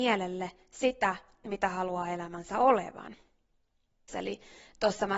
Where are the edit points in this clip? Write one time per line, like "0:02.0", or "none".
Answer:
0:04.1